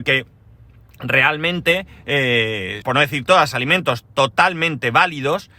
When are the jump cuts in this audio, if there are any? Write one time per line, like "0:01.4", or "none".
0:02.8